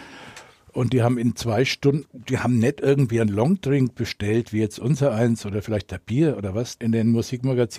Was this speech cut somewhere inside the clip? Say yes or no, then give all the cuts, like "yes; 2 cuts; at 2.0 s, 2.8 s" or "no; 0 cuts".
yes; 2 cuts; at 2.0 s, 6.8 s